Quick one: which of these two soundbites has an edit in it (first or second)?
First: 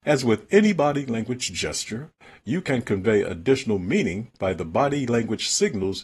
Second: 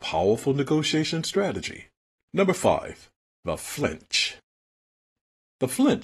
second